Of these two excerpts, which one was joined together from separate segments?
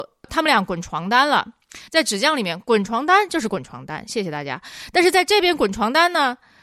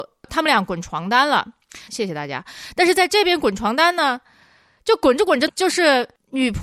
second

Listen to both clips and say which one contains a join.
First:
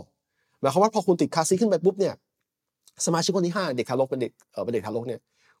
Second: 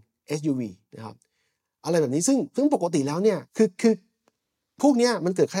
second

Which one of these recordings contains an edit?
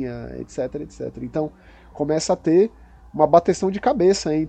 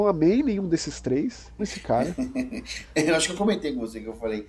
second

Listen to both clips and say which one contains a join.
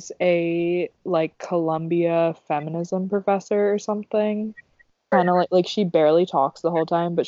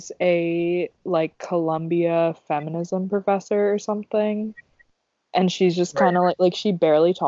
first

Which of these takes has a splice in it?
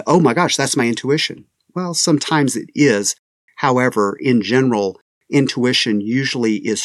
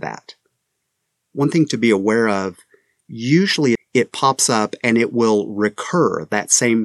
second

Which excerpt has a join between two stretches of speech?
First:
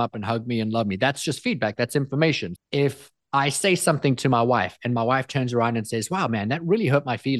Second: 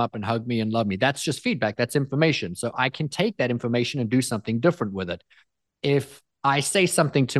first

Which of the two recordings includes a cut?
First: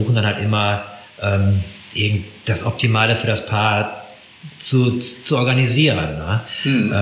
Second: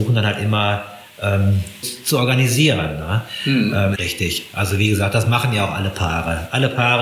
second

